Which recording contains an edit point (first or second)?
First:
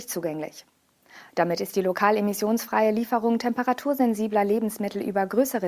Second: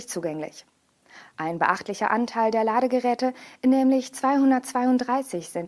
first